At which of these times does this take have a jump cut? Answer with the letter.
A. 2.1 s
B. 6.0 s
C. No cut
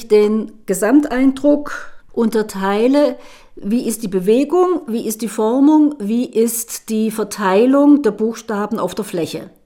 A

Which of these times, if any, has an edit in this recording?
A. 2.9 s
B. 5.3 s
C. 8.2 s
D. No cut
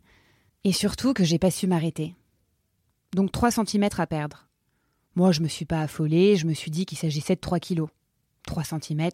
A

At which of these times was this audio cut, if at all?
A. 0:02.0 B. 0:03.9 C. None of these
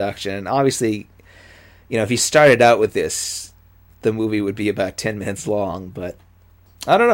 C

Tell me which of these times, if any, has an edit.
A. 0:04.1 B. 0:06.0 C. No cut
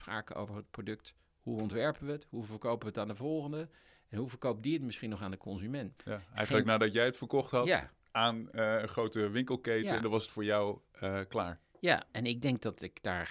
B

